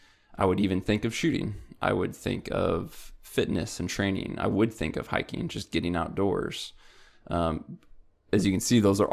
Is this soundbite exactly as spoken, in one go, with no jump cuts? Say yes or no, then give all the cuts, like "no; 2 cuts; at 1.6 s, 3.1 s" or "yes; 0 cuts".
yes; 0 cuts